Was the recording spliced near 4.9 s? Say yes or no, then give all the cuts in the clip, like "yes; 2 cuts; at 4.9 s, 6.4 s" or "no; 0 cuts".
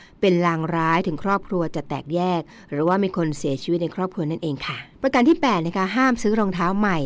yes; 1 cut; at 4.9 s